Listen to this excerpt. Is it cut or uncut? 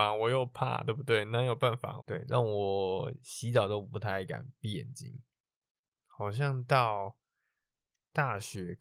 cut